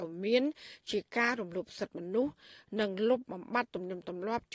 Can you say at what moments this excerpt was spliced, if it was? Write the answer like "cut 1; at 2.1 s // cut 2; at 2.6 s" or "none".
none